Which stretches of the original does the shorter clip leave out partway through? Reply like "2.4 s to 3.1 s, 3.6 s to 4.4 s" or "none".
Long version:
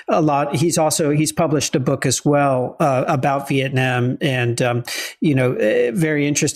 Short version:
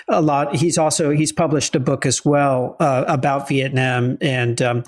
none